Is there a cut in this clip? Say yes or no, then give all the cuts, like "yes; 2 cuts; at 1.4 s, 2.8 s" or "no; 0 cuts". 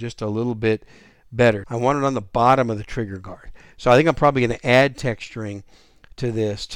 yes; 1 cut; at 1.6 s